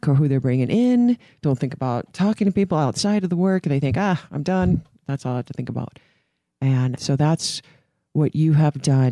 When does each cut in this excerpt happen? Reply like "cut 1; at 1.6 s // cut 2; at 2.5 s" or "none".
cut 1; at 7.0 s